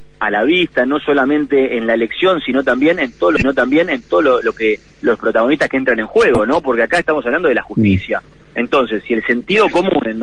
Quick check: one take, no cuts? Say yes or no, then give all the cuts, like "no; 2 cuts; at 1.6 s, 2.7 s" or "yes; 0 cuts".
yes; 0 cuts